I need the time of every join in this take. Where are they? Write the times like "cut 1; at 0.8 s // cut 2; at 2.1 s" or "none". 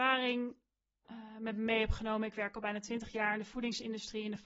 none